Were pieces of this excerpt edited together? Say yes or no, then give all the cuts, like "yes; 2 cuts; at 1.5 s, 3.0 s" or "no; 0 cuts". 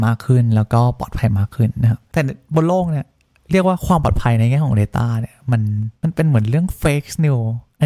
no; 0 cuts